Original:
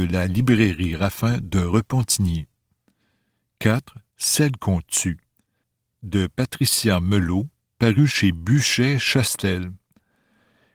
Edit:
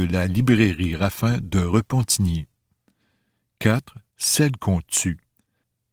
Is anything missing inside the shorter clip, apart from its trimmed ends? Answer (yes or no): no